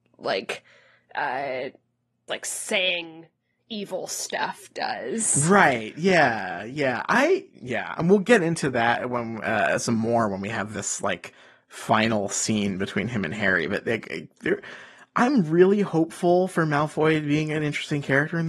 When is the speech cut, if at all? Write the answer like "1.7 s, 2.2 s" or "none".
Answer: 2.3 s